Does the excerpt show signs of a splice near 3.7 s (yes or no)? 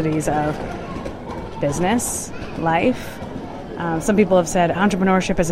no